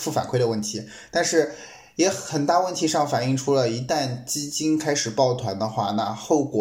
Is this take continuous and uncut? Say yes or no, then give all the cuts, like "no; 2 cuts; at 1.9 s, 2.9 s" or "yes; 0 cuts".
yes; 0 cuts